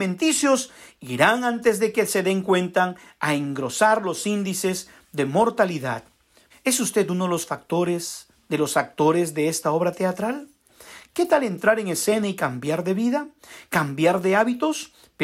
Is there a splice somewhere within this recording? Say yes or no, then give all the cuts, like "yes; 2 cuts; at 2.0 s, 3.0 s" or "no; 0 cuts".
yes; 1 cut; at 6.5 s